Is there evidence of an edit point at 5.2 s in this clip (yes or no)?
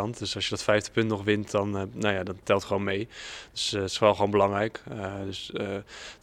no